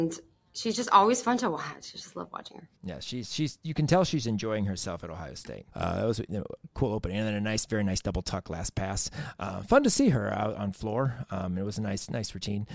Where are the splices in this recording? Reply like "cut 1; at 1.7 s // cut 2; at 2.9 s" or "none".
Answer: cut 1; at 2.8 s // cut 2; at 5.7 s

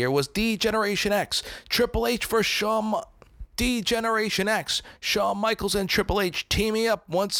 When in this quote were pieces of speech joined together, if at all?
none

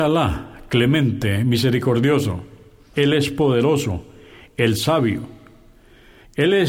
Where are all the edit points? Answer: cut 1; at 2.9 s

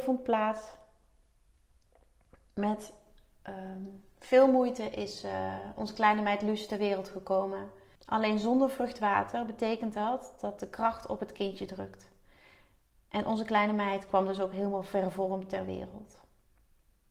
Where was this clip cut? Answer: cut 1; at 8.0 s

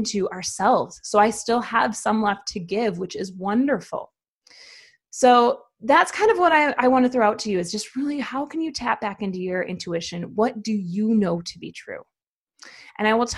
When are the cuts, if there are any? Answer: none

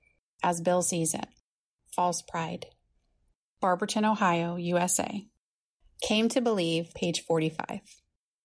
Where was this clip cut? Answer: cut 1; at 3.5 s

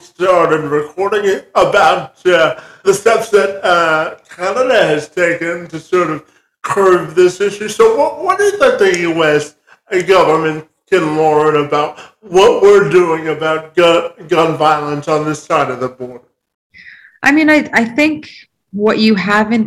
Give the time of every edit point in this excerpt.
cut 1; at 2.8 s

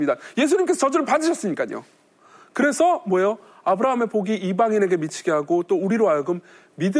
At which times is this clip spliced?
none

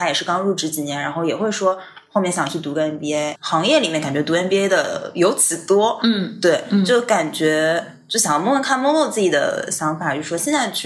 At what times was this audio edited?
cut 1; at 3.4 s

